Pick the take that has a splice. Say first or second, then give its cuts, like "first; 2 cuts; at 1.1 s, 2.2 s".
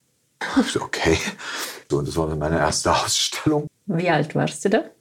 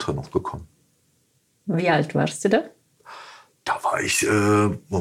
first; 2 cuts; at 1.9 s, 3.7 s